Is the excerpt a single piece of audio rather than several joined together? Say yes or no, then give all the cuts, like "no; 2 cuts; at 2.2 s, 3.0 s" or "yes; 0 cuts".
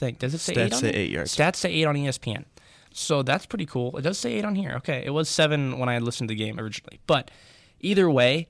yes; 0 cuts